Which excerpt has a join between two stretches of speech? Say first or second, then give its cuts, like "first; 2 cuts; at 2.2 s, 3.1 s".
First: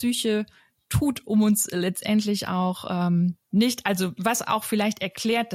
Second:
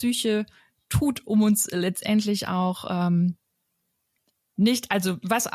first; 1 cut; at 3.4 s